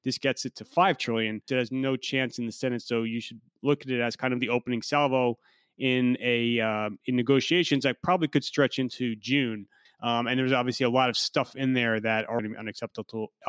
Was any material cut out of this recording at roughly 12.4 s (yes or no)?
yes